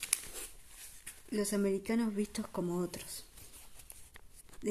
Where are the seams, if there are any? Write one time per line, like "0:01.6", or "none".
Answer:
none